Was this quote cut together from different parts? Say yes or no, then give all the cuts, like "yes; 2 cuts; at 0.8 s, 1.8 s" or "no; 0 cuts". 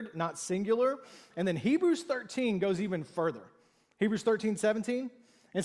no; 0 cuts